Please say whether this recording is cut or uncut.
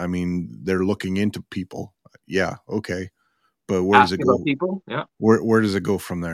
uncut